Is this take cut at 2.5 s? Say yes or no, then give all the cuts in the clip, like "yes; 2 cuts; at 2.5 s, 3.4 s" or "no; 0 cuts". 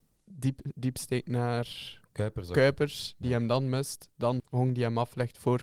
no; 1 cut; at 4.4 s